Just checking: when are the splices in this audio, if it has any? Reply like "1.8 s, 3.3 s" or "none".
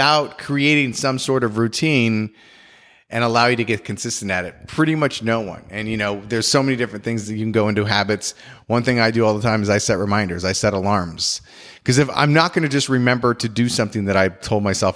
none